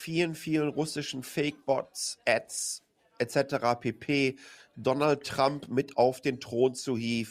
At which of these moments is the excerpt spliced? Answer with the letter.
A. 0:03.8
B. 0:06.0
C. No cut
C